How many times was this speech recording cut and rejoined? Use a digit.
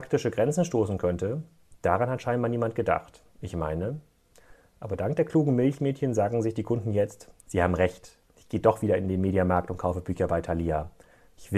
1